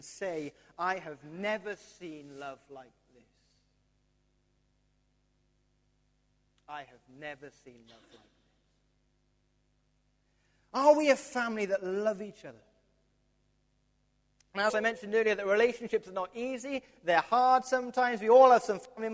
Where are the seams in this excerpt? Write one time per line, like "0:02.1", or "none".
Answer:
0:14.7